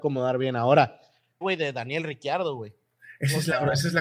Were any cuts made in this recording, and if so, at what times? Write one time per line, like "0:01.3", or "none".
0:01.4